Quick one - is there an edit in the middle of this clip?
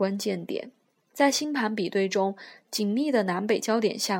yes; 1 cut; at 1.0 s

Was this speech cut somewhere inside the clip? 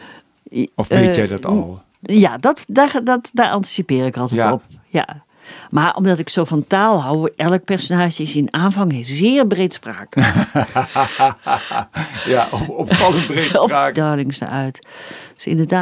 yes; 2 cuts; at 7.3 s, 13.9 s

